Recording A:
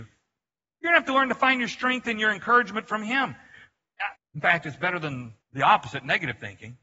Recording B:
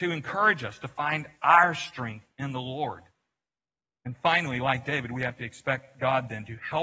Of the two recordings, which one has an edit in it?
A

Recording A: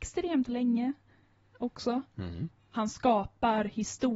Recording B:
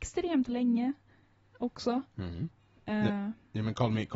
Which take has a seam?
A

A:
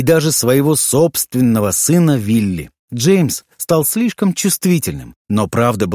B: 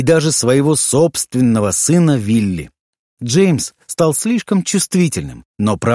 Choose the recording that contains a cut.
A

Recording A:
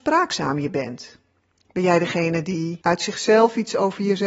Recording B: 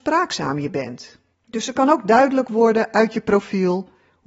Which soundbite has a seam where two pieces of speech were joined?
B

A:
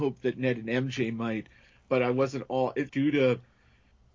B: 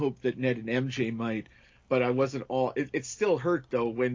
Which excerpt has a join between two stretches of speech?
A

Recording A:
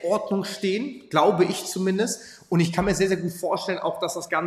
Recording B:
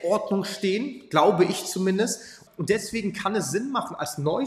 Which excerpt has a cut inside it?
B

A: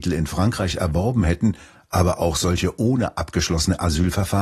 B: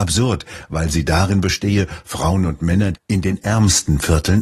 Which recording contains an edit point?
B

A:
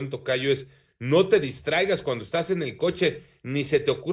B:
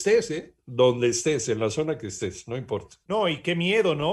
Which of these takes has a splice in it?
B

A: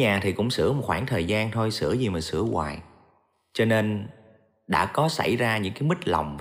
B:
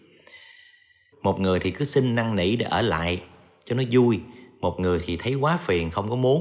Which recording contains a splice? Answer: B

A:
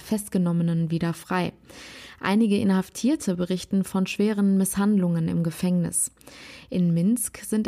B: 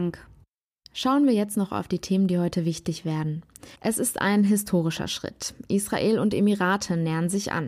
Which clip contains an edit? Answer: B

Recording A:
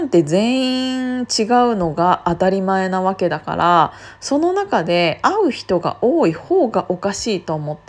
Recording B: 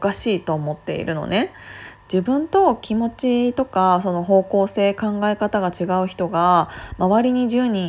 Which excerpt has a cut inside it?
B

